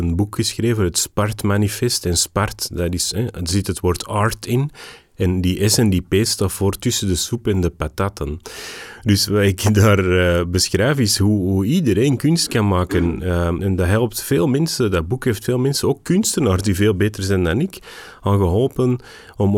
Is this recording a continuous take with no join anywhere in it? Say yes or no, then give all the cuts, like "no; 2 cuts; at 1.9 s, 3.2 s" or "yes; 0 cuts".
no; 1 cut; at 13.6 s